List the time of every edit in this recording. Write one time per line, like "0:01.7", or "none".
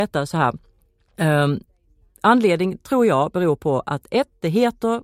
none

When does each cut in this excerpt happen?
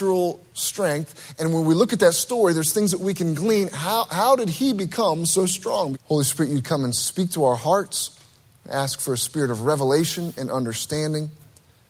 0:05.9

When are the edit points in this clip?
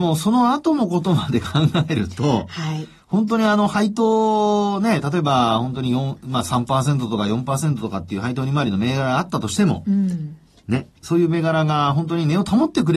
none

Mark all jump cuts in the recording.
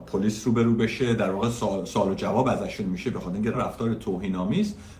0:03.5

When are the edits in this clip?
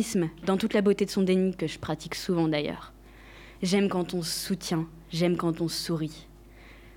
none

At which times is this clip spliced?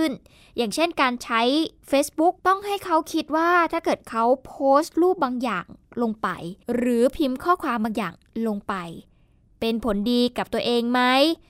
0:02.4
0:06.6

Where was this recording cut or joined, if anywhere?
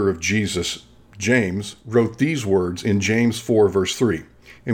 none

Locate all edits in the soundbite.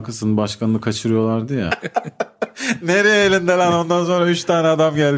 0:01.7

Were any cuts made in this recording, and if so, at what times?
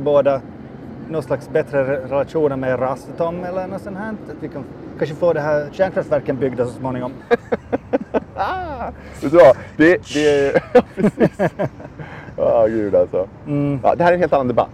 0:07.2

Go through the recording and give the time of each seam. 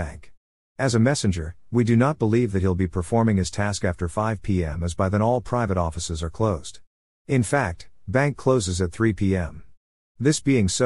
none

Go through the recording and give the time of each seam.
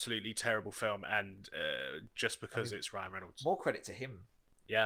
none

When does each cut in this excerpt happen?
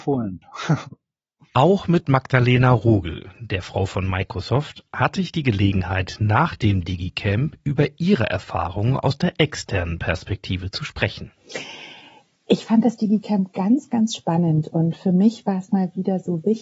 none

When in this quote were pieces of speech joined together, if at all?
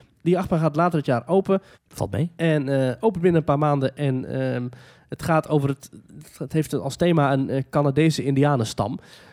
0:01.7

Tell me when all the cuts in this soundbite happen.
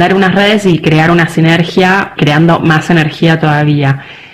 0:02.1

